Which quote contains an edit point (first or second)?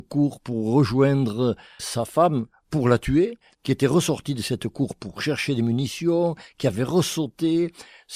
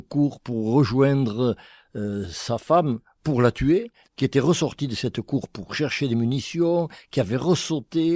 first